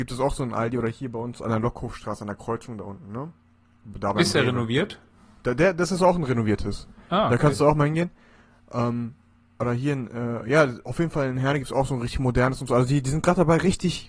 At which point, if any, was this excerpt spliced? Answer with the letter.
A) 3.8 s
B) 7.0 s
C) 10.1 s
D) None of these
D